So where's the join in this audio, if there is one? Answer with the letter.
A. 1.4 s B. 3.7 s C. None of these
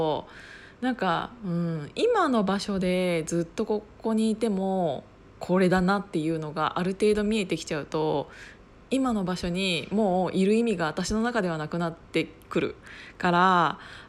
C